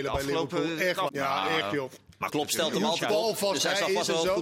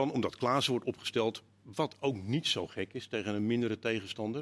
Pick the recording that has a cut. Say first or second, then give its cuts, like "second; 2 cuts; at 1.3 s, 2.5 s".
first; 2 cuts; at 1.1 s, 2.3 s